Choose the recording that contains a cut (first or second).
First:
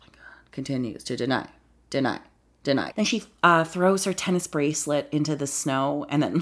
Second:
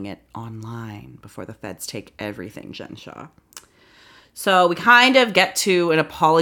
first